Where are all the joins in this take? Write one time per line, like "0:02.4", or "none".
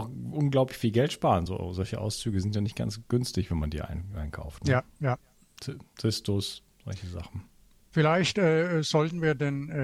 none